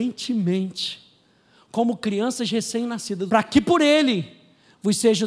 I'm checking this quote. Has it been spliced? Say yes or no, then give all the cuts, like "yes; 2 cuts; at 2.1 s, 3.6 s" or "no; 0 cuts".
yes; 1 cut; at 3.3 s